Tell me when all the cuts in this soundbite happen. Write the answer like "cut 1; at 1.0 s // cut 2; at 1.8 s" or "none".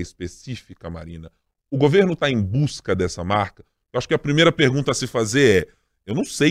none

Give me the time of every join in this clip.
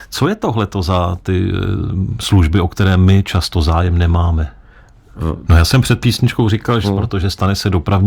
cut 1; at 5.4 s // cut 2; at 6.8 s

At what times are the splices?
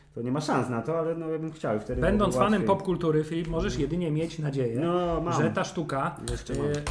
none

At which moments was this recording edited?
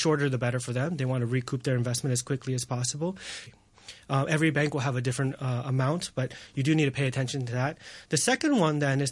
cut 1; at 3.5 s // cut 2; at 8.1 s

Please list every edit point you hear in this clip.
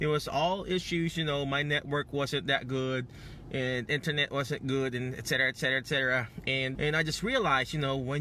cut 1; at 6.7 s

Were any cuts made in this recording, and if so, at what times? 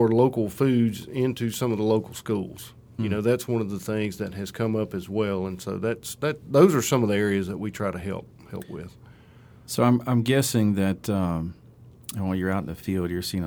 none

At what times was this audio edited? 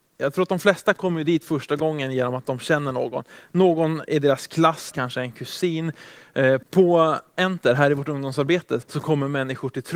cut 1; at 4.9 s // cut 2; at 6.6 s // cut 3; at 8.8 s

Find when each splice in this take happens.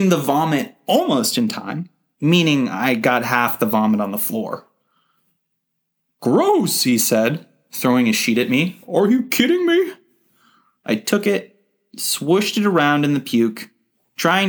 cut 1; at 2.1 s

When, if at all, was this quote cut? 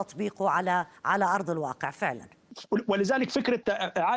cut 1; at 1.0 s

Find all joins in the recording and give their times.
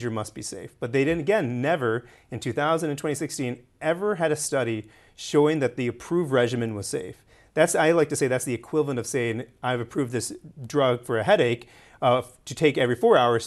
none

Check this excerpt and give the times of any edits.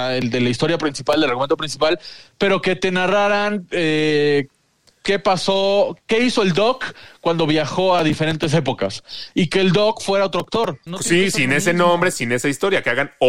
cut 1; at 10.9 s // cut 2; at 12.1 s

